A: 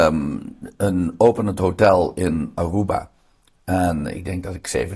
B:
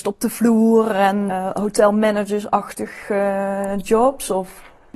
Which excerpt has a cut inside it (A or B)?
B